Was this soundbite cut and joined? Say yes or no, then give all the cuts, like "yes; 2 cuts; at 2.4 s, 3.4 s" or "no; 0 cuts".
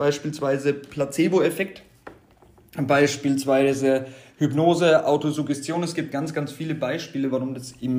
no; 0 cuts